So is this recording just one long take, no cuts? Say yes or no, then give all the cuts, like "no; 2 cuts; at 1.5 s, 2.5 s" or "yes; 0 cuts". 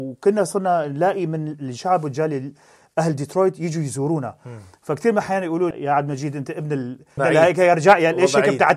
no; 2 cuts; at 5.7 s, 7.2 s